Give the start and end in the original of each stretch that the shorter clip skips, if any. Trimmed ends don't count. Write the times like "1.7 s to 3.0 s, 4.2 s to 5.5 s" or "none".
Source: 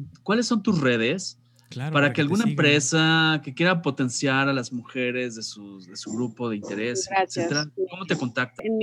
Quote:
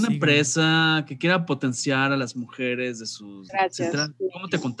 5.9 s to 7.1 s